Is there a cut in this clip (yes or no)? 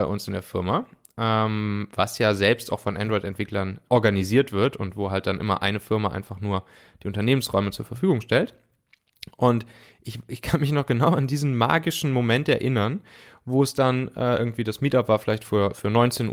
yes